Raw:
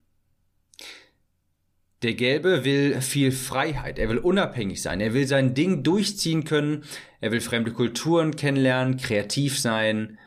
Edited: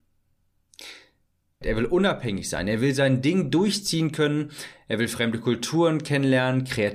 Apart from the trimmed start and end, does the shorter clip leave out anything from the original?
yes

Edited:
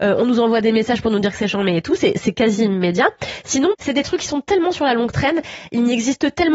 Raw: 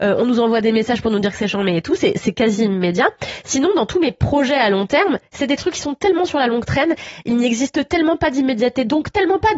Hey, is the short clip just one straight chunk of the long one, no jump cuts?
no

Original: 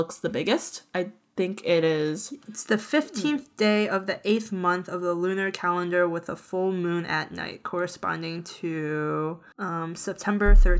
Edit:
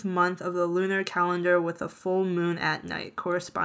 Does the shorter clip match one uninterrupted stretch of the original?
yes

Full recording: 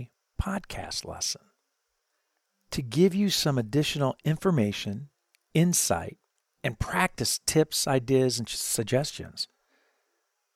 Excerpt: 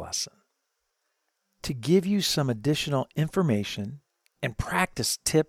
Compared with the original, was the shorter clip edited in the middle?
yes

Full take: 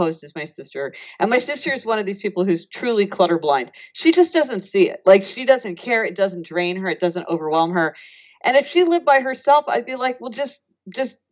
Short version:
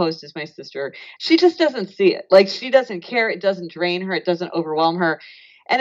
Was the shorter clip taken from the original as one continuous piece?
no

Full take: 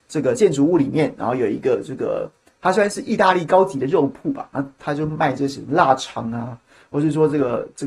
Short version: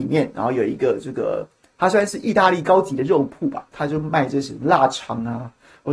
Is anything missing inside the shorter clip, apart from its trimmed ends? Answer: yes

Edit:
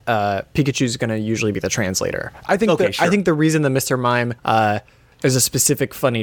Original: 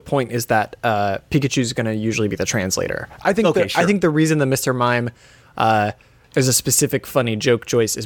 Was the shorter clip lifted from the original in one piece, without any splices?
no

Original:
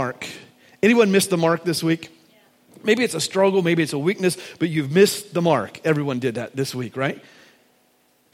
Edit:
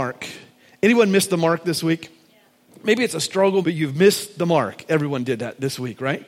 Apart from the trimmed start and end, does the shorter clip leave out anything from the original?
yes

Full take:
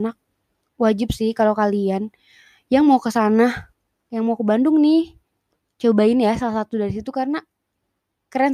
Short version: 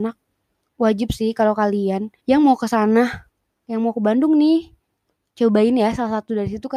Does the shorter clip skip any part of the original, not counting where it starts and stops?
yes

